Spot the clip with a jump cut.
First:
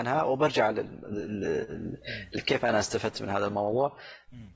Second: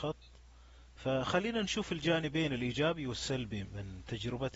second; 1 cut; at 3.6 s

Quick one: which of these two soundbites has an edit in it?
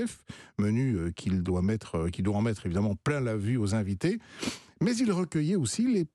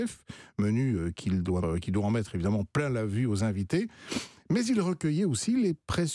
second; 1 cut; at 1.6 s

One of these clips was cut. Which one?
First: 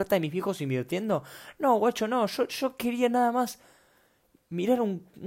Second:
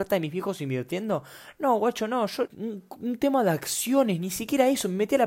second; 1 cut; at 2.5 s

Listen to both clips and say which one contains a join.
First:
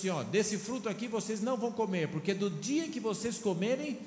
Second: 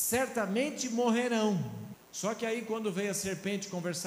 second; 1 cut; at 1.9 s

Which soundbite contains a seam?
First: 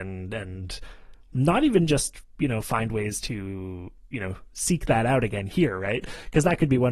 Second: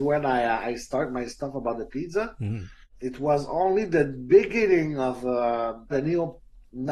second; 1 cut; at 5.9 s

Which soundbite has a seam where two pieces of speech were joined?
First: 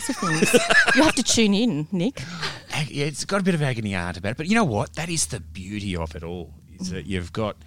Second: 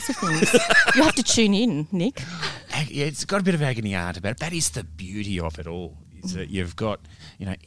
second; 1 cut; at 4.4 s

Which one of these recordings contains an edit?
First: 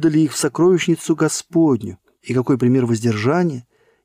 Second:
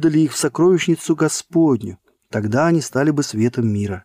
second; 1 cut; at 2.2 s

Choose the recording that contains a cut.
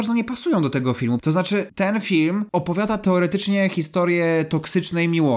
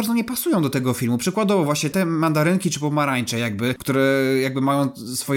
first; 1 cut; at 1.2 s

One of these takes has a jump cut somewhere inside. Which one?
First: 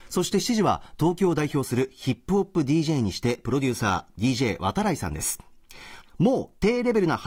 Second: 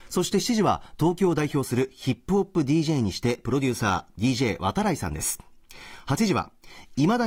first; 1 cut; at 6.0 s

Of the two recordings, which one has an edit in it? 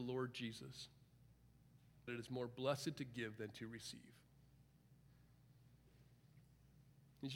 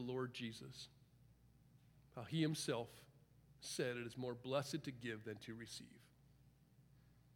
first; 1 cut; at 2.1 s

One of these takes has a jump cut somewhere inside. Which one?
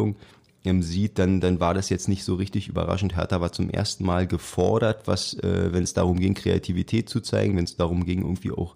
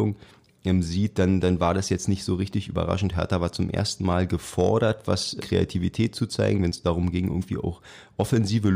second; 1 cut; at 5.4 s

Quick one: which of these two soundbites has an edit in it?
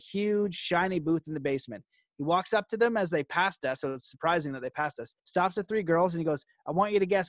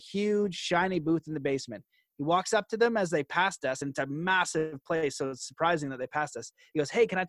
first; 2 cuts; at 3.8 s, 5.2 s

